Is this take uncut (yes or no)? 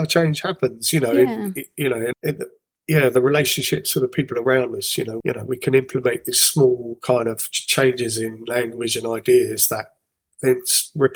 no